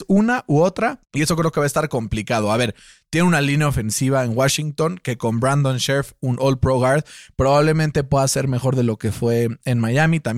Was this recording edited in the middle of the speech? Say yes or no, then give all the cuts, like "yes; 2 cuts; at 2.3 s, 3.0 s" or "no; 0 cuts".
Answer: yes; 1 cut; at 1.0 s